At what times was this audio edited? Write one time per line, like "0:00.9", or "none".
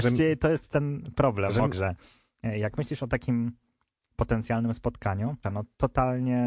0:01.7
0:05.4